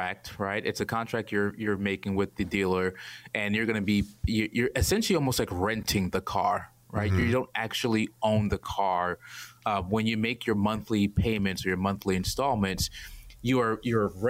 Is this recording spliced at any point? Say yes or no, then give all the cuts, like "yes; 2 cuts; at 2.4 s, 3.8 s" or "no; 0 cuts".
no; 0 cuts